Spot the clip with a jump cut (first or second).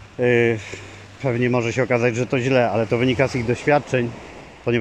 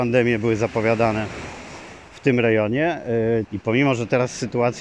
second